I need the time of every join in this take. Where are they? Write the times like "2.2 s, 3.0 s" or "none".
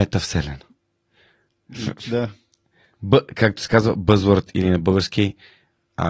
none